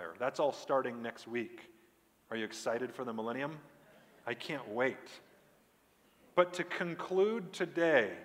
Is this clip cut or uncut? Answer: uncut